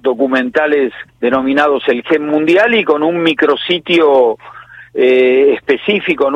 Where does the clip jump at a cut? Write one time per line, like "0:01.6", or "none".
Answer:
0:01.1